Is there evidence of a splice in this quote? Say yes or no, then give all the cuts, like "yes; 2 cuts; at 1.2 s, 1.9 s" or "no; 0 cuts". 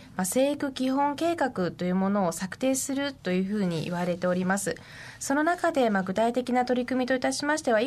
no; 0 cuts